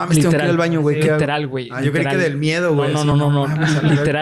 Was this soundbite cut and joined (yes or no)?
no